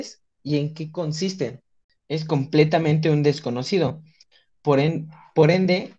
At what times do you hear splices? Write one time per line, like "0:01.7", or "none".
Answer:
0:02.0